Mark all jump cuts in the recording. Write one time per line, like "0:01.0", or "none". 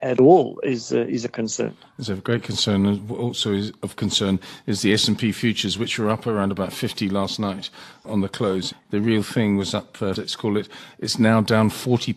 0:08.7
0:10.2